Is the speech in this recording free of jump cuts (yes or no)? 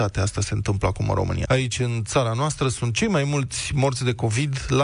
no